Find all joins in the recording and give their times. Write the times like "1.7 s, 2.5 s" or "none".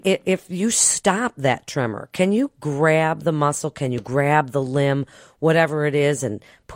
none